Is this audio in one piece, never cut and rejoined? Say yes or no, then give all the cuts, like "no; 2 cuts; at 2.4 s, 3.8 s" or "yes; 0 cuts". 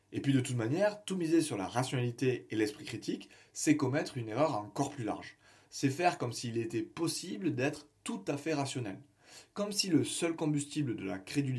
yes; 0 cuts